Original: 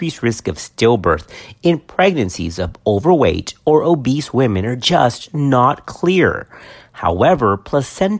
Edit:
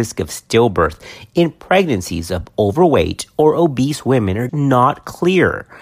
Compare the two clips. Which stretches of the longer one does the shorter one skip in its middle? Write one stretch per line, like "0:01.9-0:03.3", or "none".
0:04.8-0:05.3